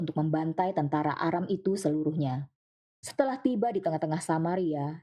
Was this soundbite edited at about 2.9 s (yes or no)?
yes